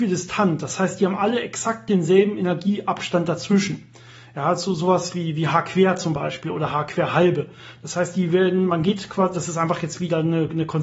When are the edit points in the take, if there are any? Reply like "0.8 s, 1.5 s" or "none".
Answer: none